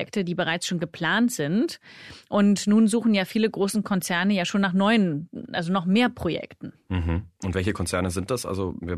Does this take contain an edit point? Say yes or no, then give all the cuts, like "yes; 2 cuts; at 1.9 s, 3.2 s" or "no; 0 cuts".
yes; 1 cut; at 7.3 s